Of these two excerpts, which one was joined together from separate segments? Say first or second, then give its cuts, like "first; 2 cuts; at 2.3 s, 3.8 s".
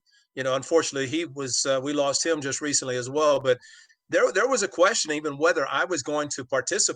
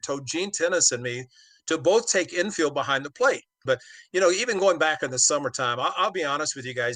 second; 1 cut; at 3.7 s